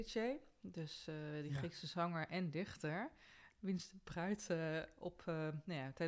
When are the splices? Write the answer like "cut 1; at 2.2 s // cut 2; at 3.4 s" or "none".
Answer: none